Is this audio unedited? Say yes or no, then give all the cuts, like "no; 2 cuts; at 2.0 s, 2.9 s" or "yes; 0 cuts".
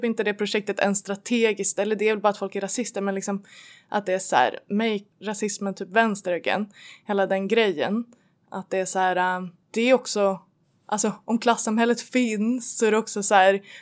yes; 0 cuts